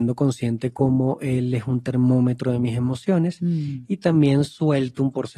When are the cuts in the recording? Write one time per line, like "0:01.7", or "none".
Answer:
none